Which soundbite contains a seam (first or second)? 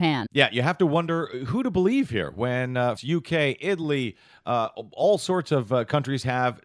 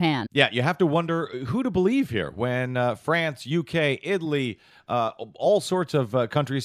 first